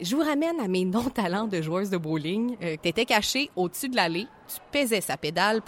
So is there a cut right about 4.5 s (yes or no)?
yes